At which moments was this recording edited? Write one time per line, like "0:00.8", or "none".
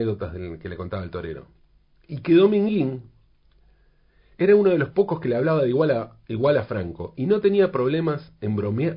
none

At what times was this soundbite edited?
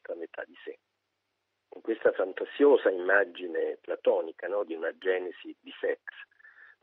none

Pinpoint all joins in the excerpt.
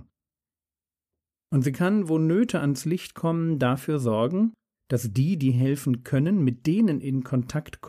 0:01.3

